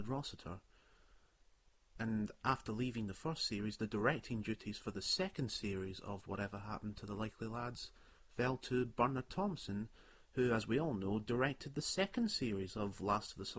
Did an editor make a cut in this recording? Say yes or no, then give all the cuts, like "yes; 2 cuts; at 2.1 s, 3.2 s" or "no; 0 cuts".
yes; 1 cut; at 2.0 s